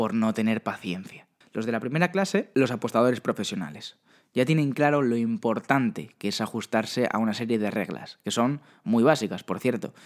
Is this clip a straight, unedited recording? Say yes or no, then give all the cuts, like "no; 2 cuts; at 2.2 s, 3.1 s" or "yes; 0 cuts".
no; 1 cut; at 1.4 s